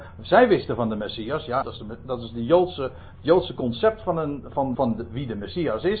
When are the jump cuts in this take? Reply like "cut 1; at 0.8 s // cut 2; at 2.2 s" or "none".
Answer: cut 1; at 1.6 s // cut 2; at 4.7 s